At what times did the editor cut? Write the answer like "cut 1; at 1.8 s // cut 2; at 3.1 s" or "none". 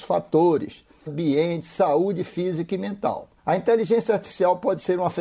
cut 1; at 1.1 s // cut 2; at 3.4 s